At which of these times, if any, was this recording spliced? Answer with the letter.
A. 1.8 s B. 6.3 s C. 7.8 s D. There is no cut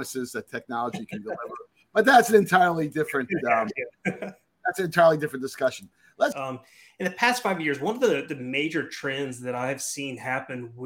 B